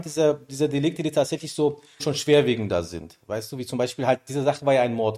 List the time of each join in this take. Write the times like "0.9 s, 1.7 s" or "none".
2.0 s